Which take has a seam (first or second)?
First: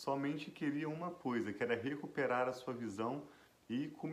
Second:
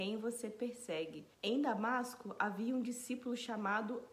second